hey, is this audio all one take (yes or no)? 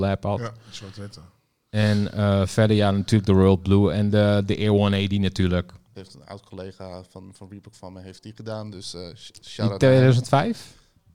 no